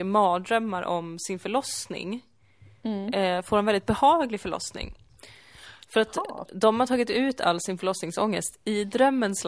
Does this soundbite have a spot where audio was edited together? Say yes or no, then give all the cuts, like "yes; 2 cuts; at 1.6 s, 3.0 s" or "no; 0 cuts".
no; 0 cuts